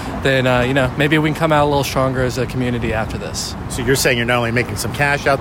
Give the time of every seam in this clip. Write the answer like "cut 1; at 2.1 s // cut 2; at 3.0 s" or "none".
none